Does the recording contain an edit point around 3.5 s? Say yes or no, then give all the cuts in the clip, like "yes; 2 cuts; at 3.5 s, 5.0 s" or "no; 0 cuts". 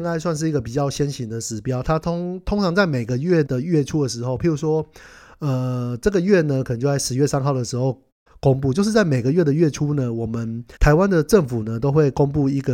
yes; 3 cuts; at 3.5 s, 8.3 s, 10.8 s